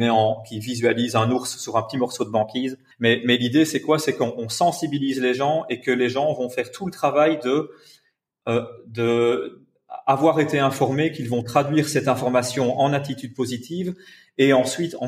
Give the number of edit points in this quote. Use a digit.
1